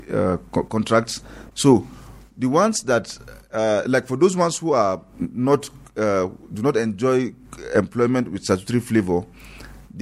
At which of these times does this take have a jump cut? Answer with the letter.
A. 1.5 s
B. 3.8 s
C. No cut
A